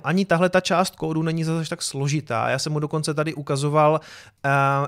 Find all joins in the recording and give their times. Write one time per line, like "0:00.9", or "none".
none

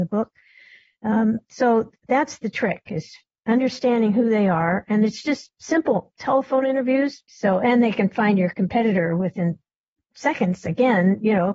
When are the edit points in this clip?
0:07.3

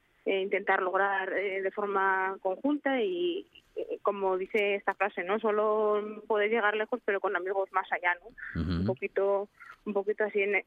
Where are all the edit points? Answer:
none

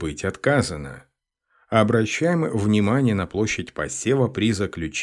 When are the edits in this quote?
none

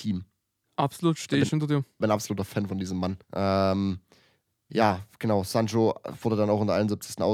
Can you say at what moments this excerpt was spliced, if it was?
0:03.2

